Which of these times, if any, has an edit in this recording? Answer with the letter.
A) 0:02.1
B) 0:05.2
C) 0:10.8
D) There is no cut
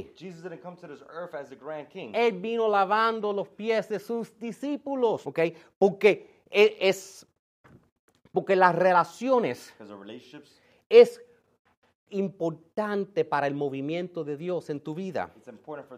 B